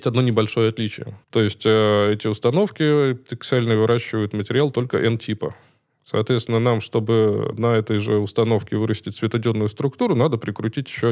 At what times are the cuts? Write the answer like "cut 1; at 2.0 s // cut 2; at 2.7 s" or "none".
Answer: cut 1; at 1.2 s